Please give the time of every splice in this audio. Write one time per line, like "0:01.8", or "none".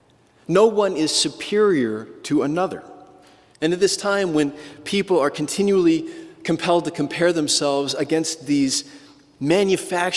0:03.5